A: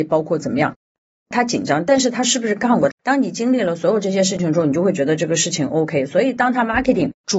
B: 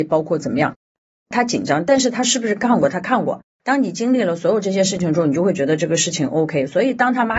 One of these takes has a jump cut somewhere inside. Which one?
A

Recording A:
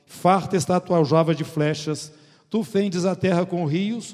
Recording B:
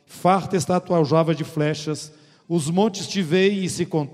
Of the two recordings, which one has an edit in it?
B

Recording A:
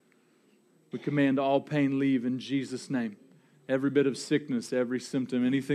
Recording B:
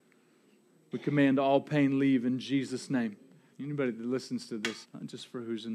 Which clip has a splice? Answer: B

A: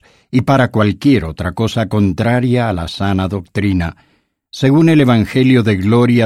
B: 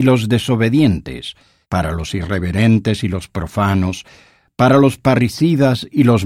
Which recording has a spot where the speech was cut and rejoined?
B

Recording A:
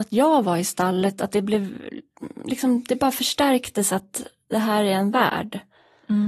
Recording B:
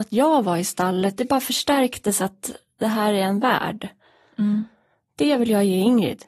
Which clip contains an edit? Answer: B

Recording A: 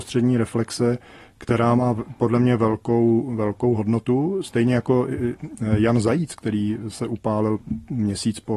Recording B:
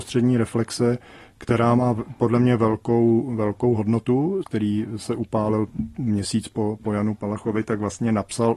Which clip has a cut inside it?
B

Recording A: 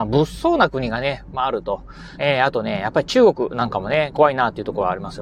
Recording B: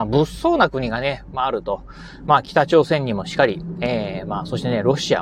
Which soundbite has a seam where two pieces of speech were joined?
A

